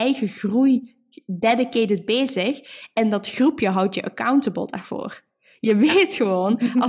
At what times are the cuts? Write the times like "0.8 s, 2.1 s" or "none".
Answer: none